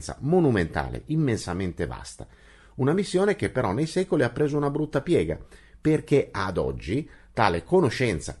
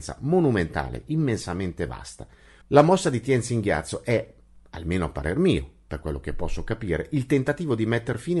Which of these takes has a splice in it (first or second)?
second